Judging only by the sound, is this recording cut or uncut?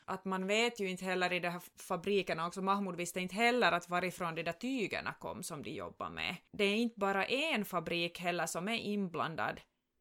uncut